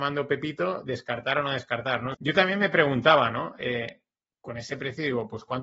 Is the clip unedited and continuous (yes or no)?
no